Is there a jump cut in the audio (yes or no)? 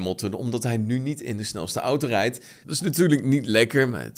yes